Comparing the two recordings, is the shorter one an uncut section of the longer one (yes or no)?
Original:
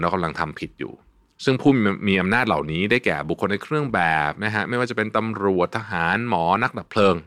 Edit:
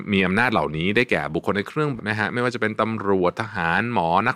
no